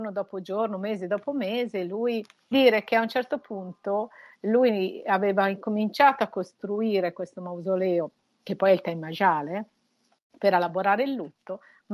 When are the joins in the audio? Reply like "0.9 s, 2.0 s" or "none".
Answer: 2.5 s